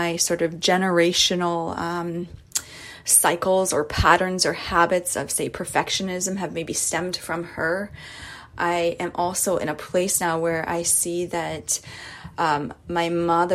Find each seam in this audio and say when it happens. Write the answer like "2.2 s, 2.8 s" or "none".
none